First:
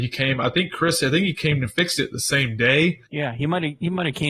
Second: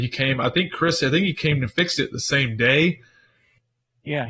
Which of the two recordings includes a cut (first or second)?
first